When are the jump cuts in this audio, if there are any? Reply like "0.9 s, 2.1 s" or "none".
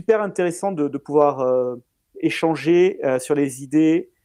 none